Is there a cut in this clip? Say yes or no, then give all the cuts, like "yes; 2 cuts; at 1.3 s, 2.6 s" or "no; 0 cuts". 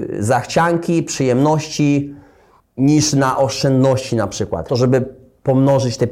yes; 1 cut; at 4.7 s